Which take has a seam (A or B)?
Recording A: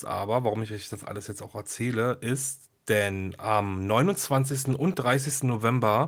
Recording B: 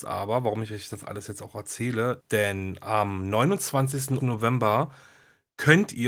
B